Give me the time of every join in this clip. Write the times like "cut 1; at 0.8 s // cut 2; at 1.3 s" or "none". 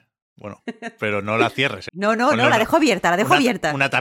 cut 1; at 1.9 s